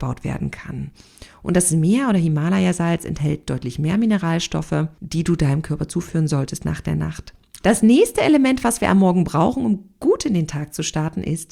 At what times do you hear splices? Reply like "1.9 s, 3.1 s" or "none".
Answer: 7.6 s